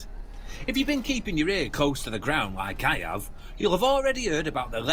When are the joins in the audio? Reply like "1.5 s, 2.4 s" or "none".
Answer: none